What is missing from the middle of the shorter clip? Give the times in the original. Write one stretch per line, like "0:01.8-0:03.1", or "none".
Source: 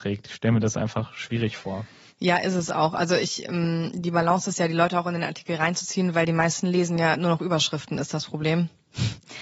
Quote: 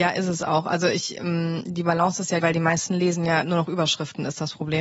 0:04.7-0:06.1

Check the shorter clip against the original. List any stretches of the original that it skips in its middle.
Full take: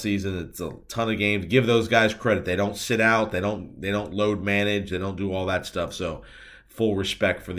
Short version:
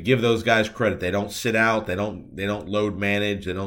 none

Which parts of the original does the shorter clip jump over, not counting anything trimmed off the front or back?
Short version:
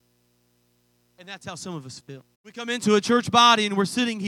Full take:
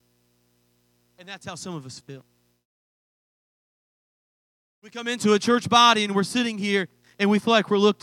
0:02.3-0:04.7

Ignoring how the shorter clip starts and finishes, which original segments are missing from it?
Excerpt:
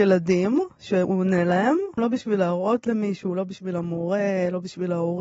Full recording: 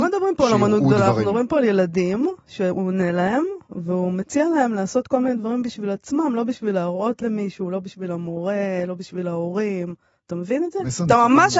0:03.6-0:06.3

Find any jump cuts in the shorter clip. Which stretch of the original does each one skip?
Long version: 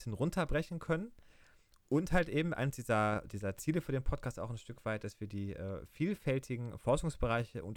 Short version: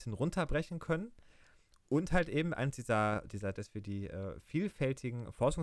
0:03.6-0:05.0

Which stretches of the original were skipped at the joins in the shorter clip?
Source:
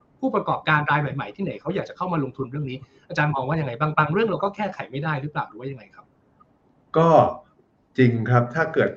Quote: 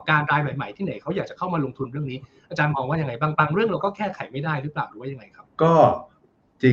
0:06.1-0:06.9

